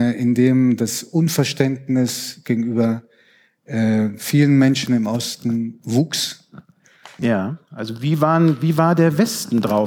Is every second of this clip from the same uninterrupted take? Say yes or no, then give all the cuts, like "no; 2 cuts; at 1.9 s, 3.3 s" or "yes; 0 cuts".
no; 1 cut; at 7.2 s